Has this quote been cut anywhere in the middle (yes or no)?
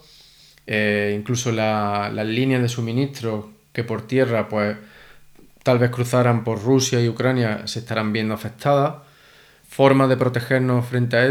yes